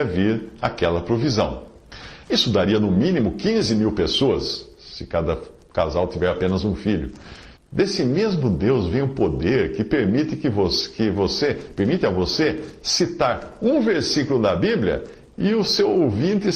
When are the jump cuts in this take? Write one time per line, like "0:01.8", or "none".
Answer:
0:02.2
0:07.6